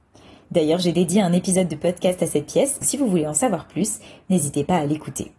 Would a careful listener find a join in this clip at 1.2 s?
no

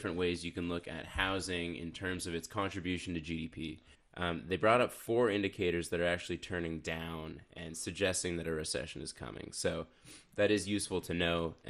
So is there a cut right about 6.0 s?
no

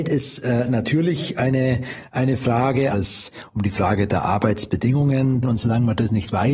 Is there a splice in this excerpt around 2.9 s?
yes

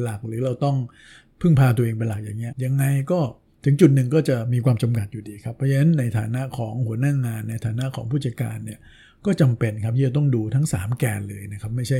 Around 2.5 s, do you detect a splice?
yes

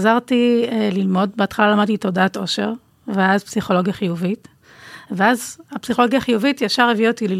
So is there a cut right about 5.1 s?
no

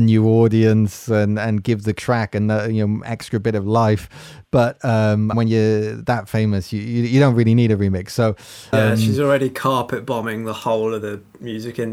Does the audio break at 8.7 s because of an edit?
yes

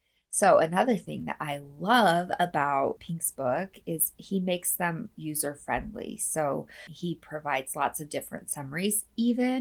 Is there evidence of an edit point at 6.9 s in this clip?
no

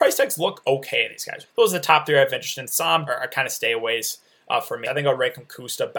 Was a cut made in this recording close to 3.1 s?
yes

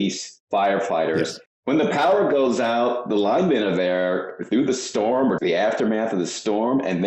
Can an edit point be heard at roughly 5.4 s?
yes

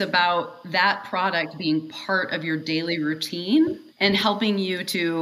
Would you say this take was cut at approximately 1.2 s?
no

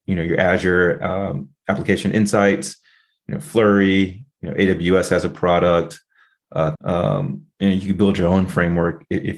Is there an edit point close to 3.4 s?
no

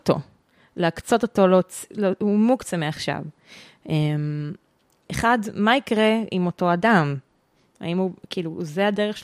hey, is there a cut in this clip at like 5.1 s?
yes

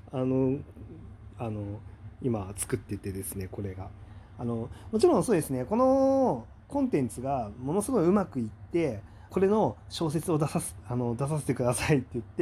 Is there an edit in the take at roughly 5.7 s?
no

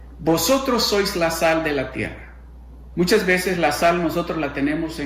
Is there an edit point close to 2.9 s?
yes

